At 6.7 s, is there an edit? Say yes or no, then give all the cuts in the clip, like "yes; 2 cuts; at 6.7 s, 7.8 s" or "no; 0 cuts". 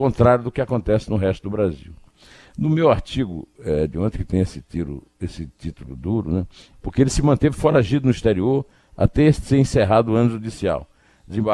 yes; 1 cut; at 6.7 s